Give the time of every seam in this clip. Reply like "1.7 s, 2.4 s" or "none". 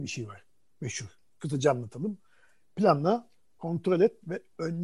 3.6 s